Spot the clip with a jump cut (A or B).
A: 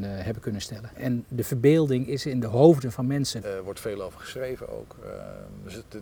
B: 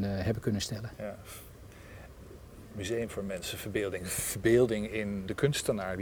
A